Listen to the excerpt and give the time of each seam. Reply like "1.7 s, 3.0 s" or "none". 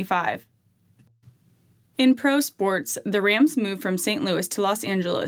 none